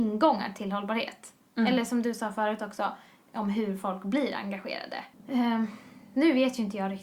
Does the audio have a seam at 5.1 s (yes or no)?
yes